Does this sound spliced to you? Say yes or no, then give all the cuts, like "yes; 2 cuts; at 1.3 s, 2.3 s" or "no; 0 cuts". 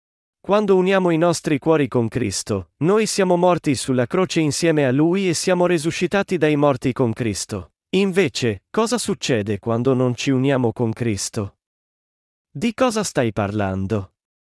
yes; 2 cuts; at 2.7 s, 7.8 s